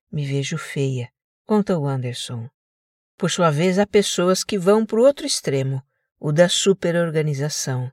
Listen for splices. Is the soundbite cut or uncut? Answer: uncut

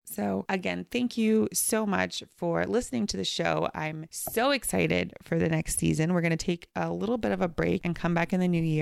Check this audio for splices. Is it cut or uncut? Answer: uncut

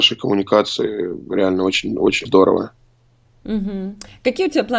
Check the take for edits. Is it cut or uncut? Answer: cut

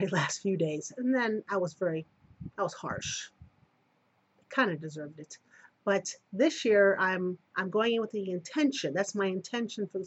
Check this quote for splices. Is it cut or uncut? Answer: uncut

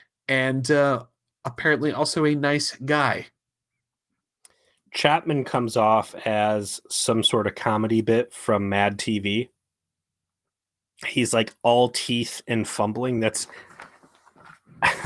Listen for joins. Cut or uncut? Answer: uncut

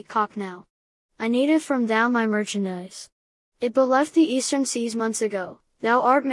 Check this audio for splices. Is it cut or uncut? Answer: uncut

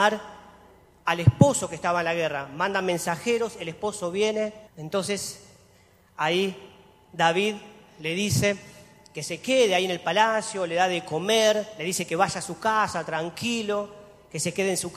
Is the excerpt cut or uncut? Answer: cut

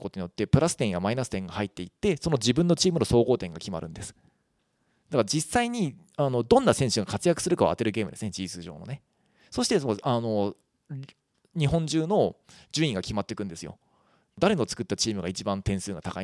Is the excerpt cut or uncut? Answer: uncut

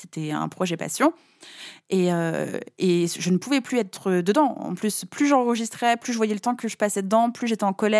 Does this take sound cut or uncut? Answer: uncut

